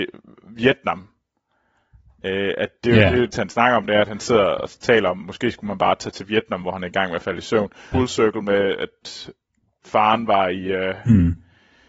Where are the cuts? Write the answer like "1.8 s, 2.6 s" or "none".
3.3 s, 7.9 s